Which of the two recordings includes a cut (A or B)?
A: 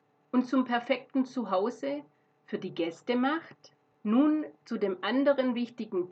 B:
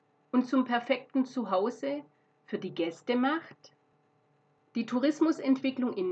A